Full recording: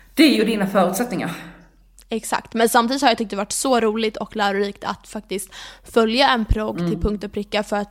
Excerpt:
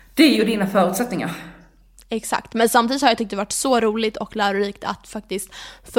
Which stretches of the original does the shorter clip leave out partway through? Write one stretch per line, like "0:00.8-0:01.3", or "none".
none